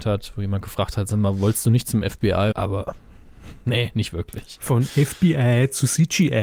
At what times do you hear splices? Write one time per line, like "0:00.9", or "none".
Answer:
0:02.5

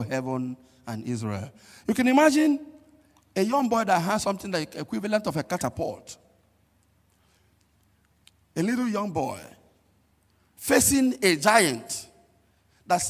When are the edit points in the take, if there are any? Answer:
none

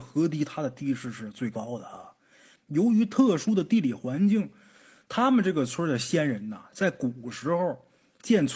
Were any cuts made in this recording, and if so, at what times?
0:02.6

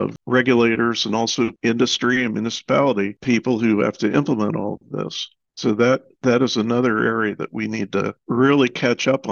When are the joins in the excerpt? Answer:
0:05.5

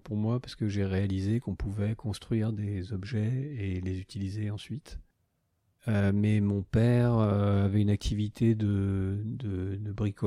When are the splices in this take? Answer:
0:05.7

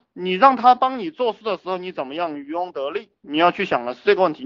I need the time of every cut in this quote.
none

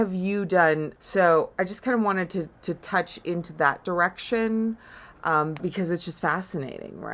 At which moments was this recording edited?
0:01.0
0:05.6

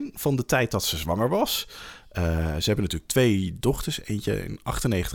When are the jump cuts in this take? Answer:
none

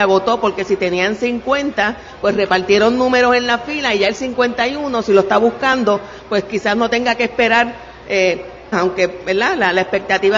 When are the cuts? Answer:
0:08.7

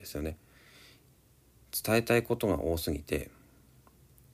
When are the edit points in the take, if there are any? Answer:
none

